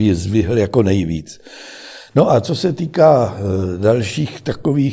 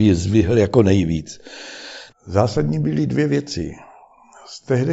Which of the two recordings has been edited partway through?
second; 1 cut; at 2.1 s

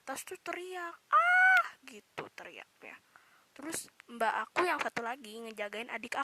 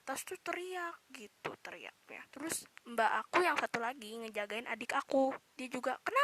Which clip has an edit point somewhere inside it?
second; 2 cuts; at 1.0 s, 2.3 s

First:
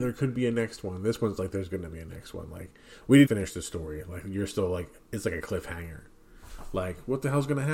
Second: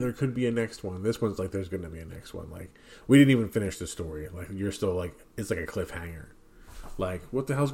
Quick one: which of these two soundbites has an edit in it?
first; 1 cut; at 3.2 s

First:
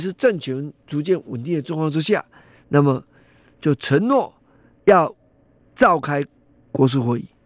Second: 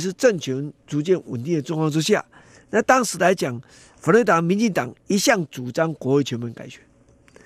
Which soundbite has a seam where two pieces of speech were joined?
second; 1 cut; at 2.6 s

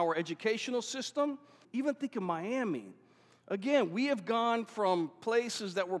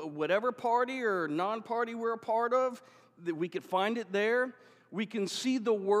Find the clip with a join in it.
first; 1 cut; at 1.6 s

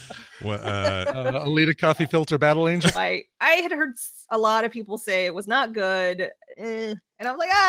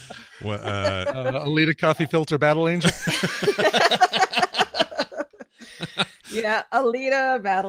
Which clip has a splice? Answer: first; 2 cuts; at 2.9 s, 6.5 s

